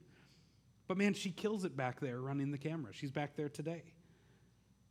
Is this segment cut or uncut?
uncut